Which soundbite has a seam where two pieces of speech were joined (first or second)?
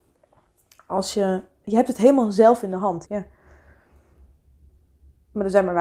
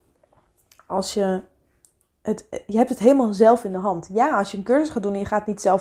first